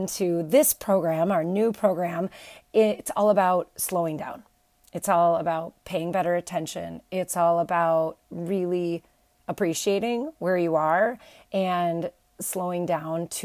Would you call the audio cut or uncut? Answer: uncut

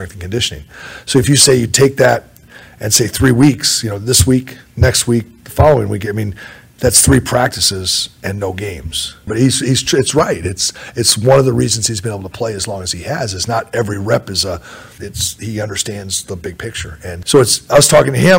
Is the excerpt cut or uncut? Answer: cut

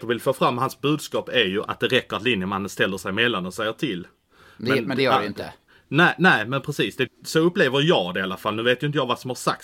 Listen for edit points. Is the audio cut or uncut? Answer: cut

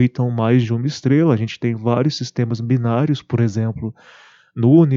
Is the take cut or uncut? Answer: uncut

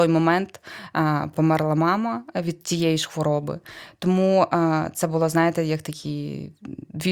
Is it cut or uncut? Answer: uncut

